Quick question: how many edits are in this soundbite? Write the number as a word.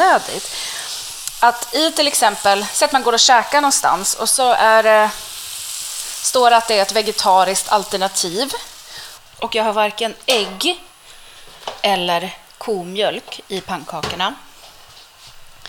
one